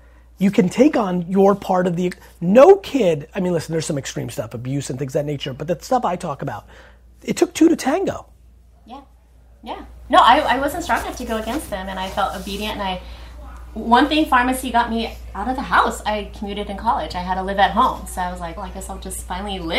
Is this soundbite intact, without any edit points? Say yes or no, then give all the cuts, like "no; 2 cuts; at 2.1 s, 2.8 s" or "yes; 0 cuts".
no; 1 cut; at 18.6 s